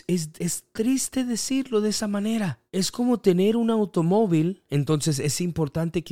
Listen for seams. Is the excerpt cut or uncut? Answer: cut